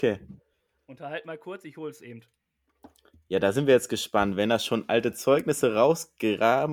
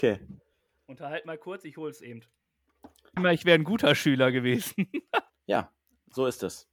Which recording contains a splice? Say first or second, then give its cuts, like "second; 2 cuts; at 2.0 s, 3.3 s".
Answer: second; 2 cuts; at 3.2 s, 5.3 s